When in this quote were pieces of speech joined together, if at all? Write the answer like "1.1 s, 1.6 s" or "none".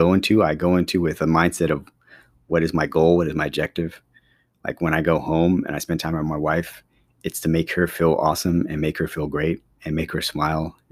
none